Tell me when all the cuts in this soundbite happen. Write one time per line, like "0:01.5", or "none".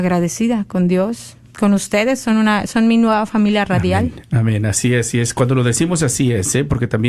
none